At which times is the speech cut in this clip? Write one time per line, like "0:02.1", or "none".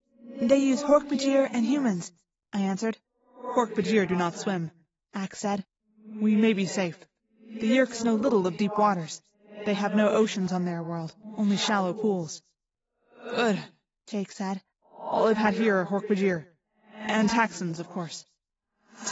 none